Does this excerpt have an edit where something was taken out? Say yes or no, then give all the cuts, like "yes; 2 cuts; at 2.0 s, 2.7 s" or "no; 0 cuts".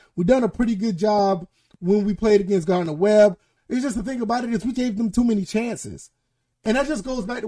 yes; 2 cuts; at 3.6 s, 4.7 s